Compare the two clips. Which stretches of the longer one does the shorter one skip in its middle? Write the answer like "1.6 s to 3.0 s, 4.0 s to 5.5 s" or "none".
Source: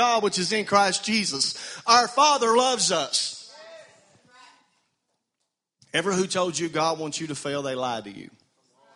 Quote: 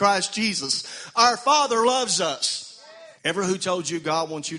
3.9 s to 5.8 s

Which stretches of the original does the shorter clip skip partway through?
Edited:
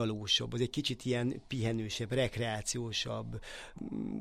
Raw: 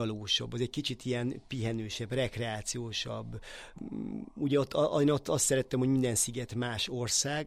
none

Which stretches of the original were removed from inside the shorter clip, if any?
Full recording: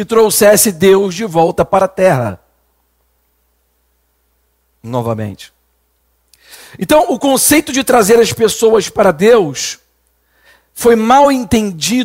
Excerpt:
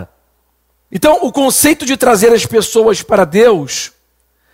3.2 s to 6.8 s

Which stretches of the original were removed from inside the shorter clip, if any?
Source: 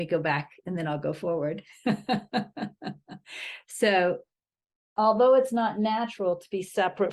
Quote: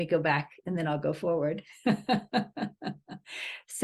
none

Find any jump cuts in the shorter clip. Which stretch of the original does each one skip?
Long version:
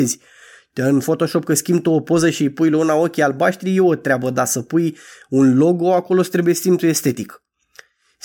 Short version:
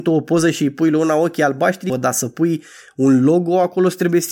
3.7 s to 4.2 s

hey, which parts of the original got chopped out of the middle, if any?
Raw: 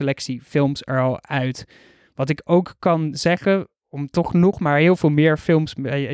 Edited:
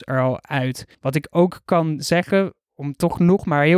1.7 s to 2.1 s

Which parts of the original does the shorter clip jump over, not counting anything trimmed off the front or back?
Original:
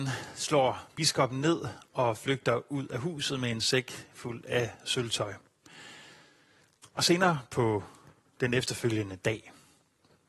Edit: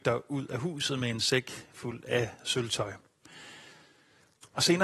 none

